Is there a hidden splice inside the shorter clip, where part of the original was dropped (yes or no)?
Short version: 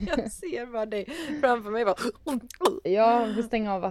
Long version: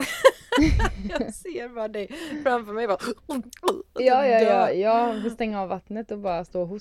yes